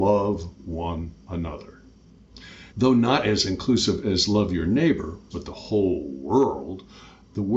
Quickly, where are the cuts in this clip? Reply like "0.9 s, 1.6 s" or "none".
2.7 s, 5.3 s